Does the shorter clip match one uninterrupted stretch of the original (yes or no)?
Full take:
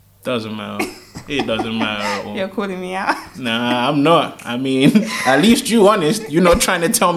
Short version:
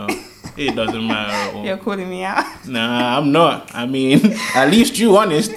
yes